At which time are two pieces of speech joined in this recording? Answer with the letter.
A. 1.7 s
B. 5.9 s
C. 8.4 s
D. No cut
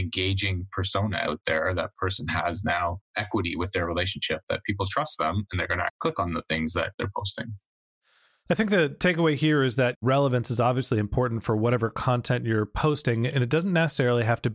B